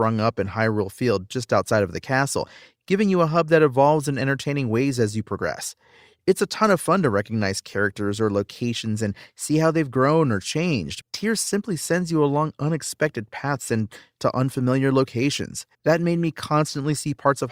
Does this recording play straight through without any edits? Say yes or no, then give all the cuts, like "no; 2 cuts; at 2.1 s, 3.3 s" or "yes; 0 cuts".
no; 2 cuts; at 11.0 s, 15.7 s